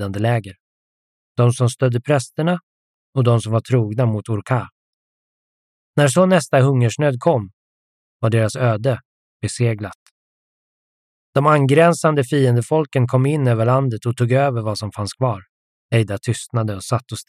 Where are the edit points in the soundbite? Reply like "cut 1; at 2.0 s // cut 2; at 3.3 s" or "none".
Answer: cut 1; at 5.8 s // cut 2; at 11.1 s // cut 3; at 15.7 s